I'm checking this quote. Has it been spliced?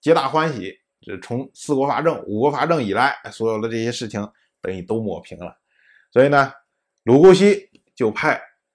no; 0 cuts

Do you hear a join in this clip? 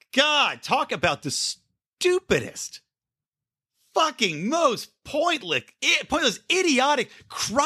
no; 0 cuts

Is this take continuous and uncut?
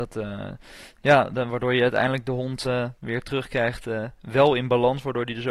yes; 0 cuts

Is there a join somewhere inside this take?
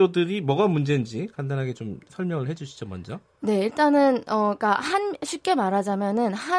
no; 0 cuts

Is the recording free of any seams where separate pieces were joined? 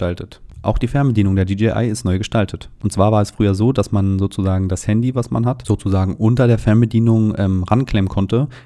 yes; 0 cuts

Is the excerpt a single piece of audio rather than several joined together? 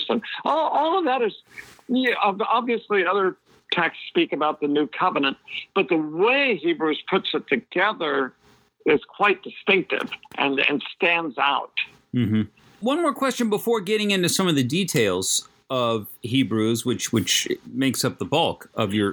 yes; 0 cuts

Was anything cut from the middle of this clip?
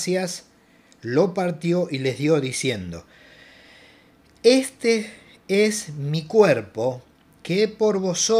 no; 0 cuts

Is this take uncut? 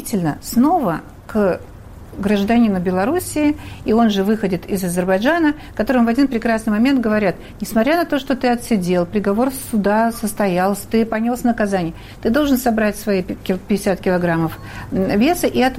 yes; 0 cuts

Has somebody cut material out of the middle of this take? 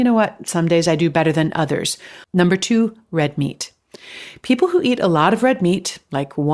yes; 1 cut; at 2.2 s

